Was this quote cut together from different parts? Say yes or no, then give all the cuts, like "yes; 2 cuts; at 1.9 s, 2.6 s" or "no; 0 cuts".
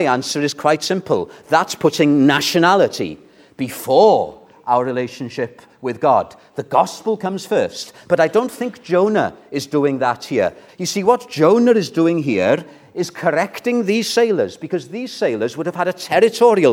yes; 1 cut; at 10.7 s